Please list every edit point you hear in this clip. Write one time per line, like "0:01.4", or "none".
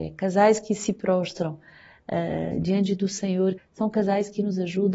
0:03.6

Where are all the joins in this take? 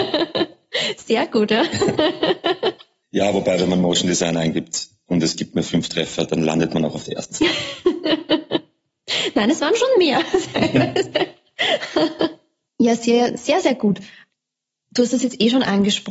none

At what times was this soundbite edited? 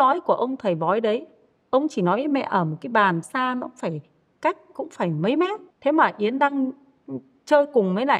0:03.2
0:05.7

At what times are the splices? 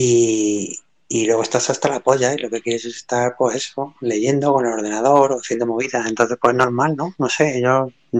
none

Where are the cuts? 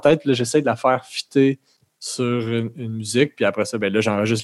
none

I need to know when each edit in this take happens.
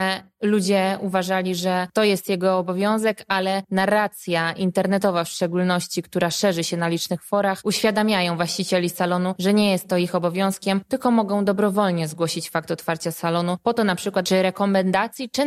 0:14.2

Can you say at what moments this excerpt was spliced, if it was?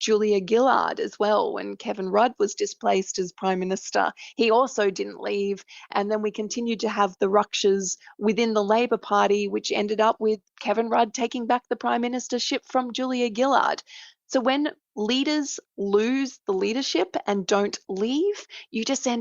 none

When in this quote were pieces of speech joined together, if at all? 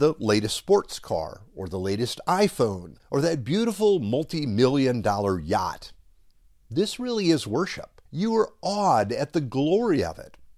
0:03.0
0:08.1

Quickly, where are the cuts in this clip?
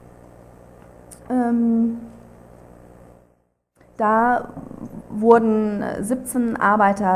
0:01.2

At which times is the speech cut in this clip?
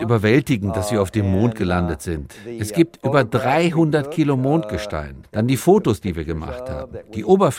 0:05.2

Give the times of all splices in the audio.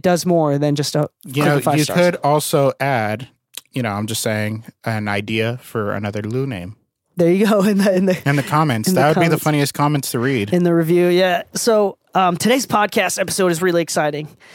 none

